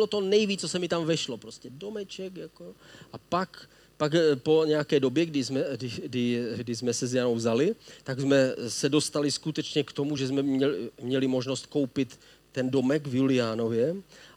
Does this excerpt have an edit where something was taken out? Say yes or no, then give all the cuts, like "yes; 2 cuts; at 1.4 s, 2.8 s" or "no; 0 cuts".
no; 0 cuts